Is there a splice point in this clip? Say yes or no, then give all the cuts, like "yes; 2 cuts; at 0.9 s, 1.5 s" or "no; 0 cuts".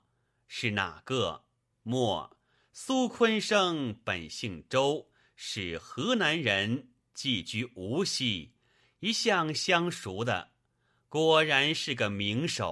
yes; 1 cut; at 1.7 s